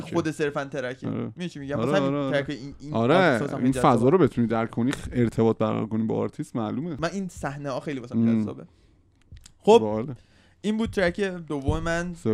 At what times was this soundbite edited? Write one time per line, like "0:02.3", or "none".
none